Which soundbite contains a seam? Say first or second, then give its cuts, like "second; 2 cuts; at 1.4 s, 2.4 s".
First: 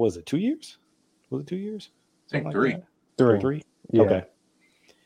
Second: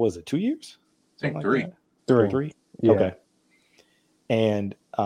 second; 1 cut; at 1.1 s